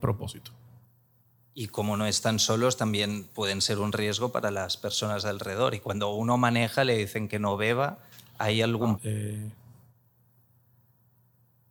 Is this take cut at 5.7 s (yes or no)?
no